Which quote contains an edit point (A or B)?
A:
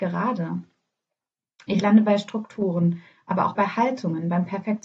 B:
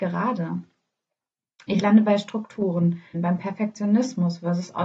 B